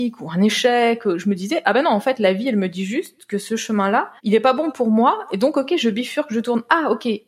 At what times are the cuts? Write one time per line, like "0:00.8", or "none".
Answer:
0:04.2